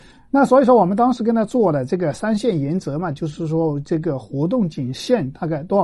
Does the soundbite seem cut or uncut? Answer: uncut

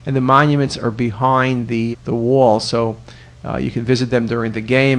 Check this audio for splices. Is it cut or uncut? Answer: cut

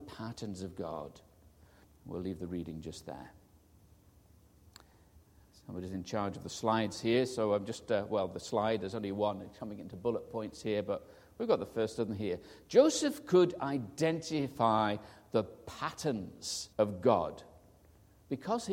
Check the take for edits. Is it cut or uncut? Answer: cut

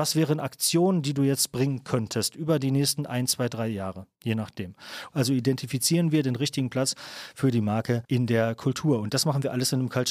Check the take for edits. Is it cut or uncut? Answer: cut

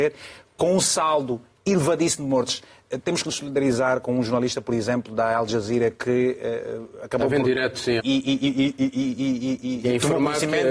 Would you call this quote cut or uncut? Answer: cut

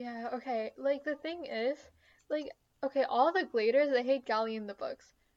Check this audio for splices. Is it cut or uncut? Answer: uncut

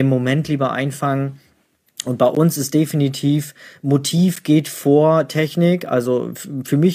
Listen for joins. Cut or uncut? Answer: uncut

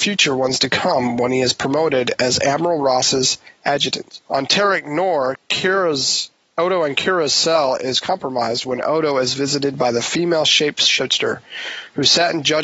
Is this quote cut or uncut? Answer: cut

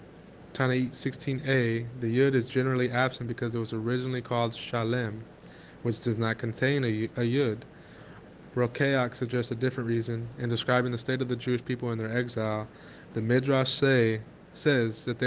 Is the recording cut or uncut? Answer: uncut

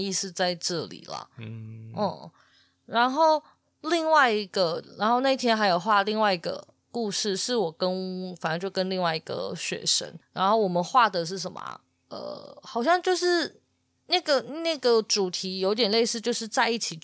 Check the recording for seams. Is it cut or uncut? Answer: uncut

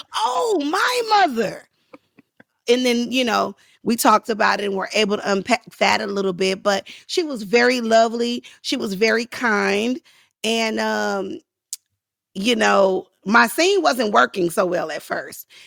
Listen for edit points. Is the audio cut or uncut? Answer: uncut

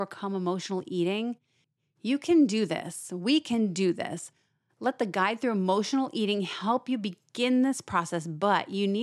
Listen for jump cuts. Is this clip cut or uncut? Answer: uncut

